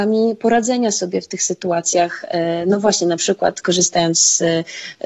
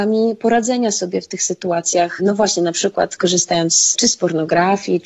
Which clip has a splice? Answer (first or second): second